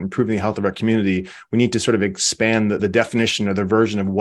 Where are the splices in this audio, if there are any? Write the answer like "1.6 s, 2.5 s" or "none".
2.8 s